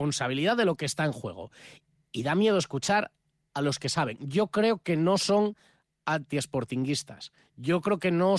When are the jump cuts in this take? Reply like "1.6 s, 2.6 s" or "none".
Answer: none